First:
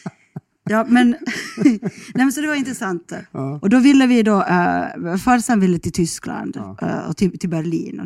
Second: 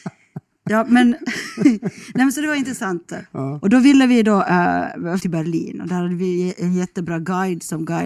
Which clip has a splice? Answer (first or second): second